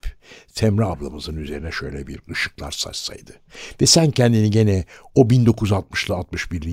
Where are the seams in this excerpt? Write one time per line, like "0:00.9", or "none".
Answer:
none